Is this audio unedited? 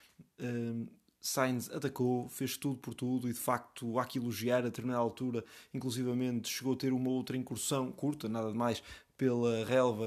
yes; 0 cuts

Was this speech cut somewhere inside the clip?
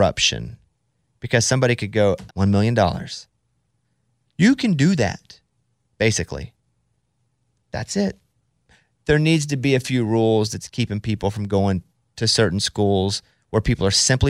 yes; 1 cut; at 2.3 s

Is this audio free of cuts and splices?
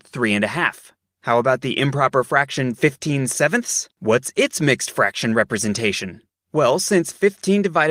yes; 0 cuts

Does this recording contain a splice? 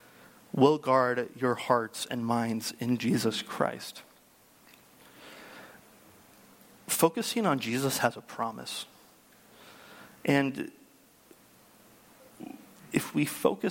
no; 0 cuts

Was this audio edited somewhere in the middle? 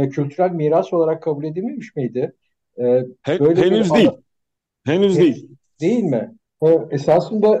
yes; 1 cut; at 6.5 s

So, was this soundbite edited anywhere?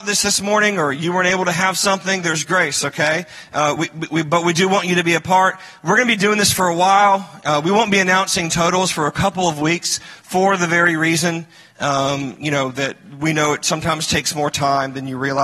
no; 0 cuts

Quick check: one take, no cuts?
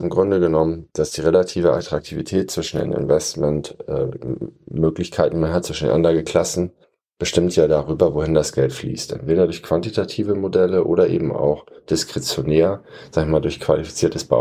yes; 0 cuts

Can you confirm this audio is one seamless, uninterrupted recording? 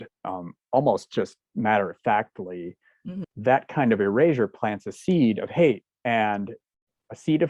no; 1 cut; at 3.2 s

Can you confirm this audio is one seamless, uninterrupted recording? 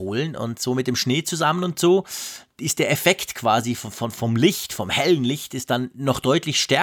yes; 0 cuts

